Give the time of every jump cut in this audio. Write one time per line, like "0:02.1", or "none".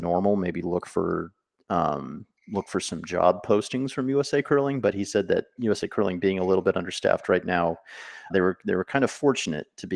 0:08.3